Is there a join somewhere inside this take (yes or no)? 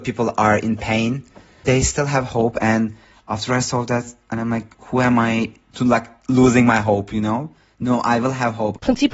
yes